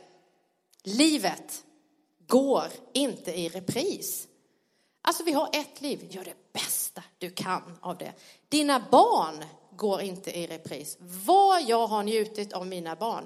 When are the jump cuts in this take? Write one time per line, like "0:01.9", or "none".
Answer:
0:06.1